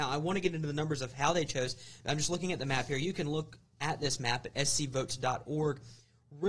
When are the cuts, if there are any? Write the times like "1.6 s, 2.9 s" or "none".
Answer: none